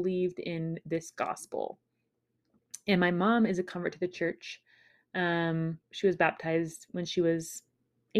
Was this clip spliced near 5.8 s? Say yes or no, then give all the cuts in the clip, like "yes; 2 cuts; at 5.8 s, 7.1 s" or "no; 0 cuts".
yes; 1 cut; at 5.8 s